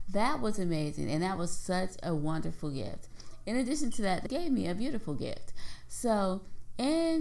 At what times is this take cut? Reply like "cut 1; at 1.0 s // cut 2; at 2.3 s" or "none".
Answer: cut 1; at 4.3 s